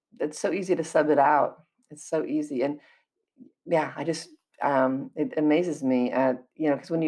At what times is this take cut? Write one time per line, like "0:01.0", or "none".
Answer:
none